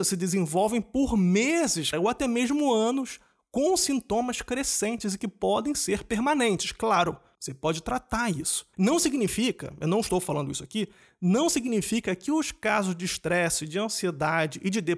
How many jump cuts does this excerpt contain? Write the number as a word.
two